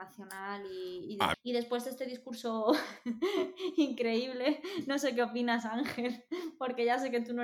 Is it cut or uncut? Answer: cut